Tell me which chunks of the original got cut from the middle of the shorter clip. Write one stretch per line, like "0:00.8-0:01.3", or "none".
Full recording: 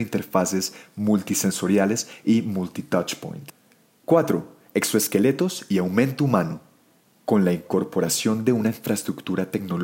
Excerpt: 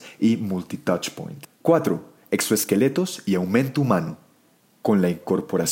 0:03.6-0:04.0